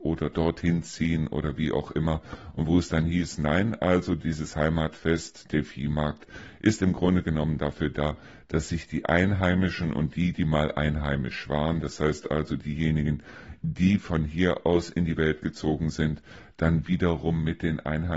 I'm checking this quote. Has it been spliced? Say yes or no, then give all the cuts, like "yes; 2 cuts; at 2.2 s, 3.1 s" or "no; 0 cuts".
no; 0 cuts